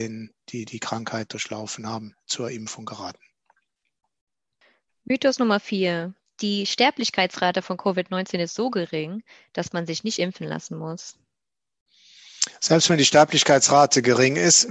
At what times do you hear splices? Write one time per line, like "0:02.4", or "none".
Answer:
none